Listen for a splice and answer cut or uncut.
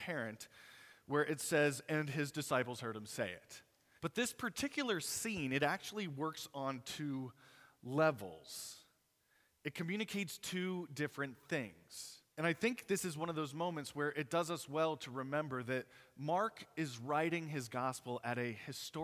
cut